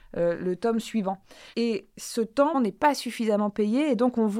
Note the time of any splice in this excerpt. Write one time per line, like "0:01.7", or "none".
0:01.5
0:02.5